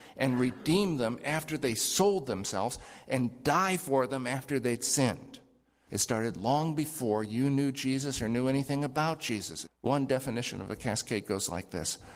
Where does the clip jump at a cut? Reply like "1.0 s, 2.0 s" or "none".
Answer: 5.9 s, 9.7 s